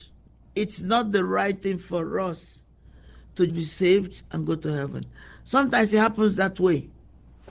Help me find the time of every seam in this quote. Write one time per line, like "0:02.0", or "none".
0:03.5